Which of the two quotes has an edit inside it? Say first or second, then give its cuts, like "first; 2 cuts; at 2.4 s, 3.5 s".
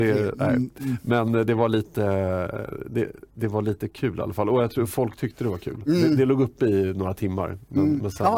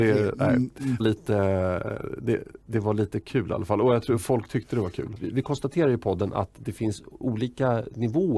second; 2 cuts; at 1.0 s, 5.2 s